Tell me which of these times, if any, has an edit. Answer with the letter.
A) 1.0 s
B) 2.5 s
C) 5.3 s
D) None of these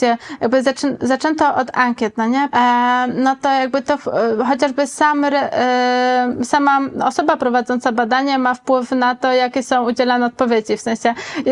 B